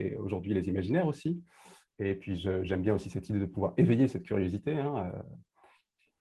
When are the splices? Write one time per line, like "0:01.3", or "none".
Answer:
none